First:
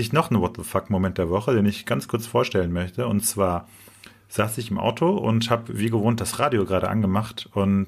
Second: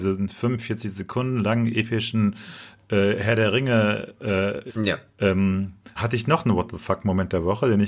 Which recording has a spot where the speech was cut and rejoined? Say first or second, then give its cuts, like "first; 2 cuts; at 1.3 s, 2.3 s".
second; 2 cuts; at 4.7 s, 6.0 s